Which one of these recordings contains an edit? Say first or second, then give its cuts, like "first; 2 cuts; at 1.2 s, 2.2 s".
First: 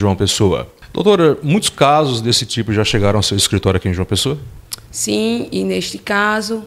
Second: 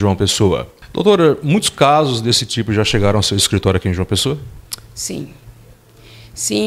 first; 1 cut; at 4.9 s